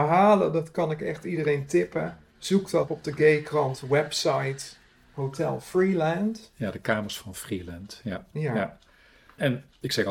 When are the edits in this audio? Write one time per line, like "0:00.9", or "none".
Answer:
0:02.9